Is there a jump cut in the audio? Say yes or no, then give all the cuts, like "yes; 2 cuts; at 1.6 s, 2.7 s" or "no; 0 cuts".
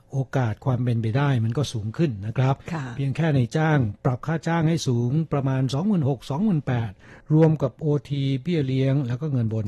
no; 0 cuts